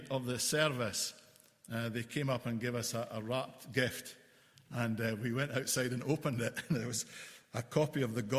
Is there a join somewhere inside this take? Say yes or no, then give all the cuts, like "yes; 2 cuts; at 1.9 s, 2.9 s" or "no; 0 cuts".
no; 0 cuts